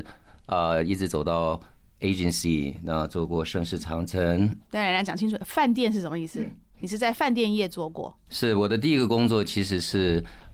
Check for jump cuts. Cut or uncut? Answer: uncut